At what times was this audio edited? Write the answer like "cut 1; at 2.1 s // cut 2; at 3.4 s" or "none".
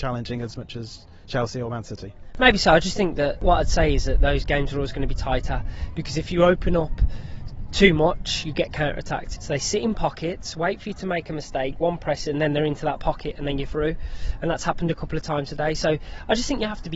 cut 1; at 9.4 s